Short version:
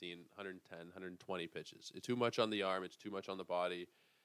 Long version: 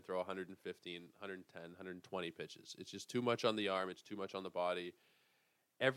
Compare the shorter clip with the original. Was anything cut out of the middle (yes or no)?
yes